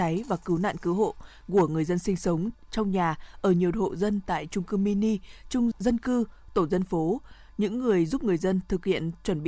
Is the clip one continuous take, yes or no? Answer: no